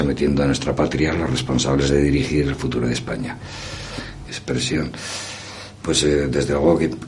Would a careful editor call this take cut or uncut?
cut